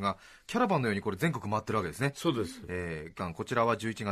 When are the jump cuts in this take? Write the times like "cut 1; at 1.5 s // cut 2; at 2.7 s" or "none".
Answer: cut 1; at 3.2 s